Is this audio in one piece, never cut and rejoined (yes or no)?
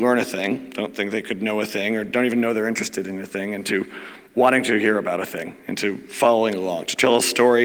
yes